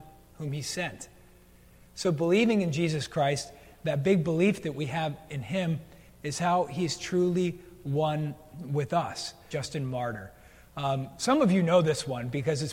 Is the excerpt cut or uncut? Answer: cut